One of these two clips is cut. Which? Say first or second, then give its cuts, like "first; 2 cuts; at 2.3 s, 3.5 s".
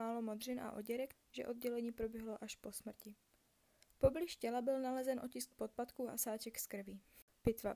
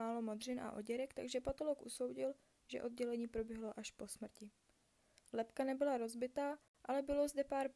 first; 2 cuts; at 1.1 s, 3.9 s